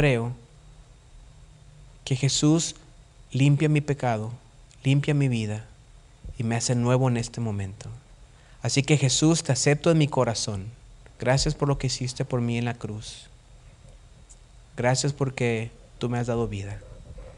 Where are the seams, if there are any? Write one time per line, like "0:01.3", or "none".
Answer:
0:11.1